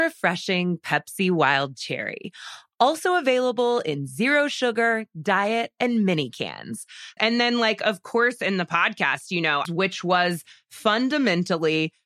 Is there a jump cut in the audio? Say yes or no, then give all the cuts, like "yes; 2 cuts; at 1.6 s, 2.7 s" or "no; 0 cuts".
yes; 2 cuts; at 7.2 s, 9.6 s